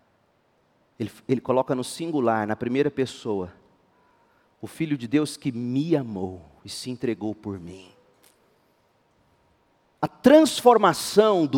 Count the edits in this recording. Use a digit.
1